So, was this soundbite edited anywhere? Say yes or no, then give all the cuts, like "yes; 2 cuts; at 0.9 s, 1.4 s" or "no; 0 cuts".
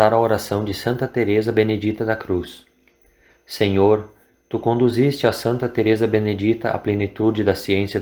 yes; 1 cut; at 4.4 s